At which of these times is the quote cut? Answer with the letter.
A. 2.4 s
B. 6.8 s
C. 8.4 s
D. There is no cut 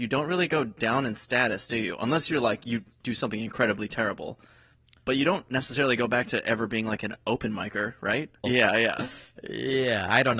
C